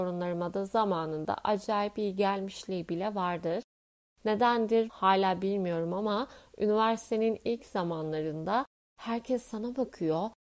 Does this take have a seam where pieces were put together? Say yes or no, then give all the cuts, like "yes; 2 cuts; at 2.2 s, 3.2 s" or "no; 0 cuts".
no; 0 cuts